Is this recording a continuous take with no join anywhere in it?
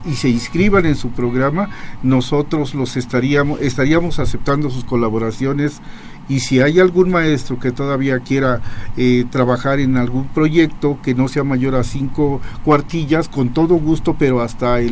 yes; 0 cuts

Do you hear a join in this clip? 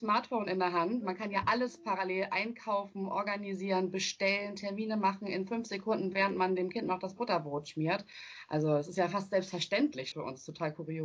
yes; 1 cut; at 10.1 s

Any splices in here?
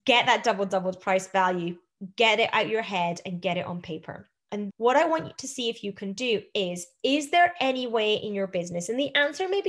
yes; 1 cut; at 4.7 s

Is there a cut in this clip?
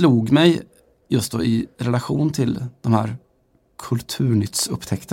no; 0 cuts

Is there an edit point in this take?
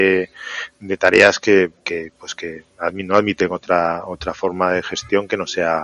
no; 0 cuts

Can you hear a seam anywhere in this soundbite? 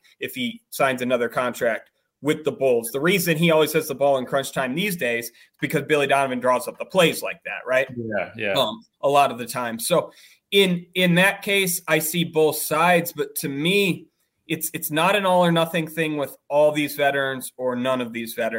no; 0 cuts

